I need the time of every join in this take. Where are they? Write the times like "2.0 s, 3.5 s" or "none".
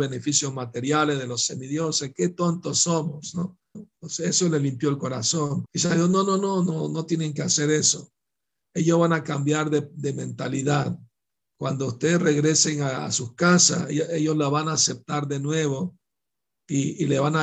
3.7 s, 5.6 s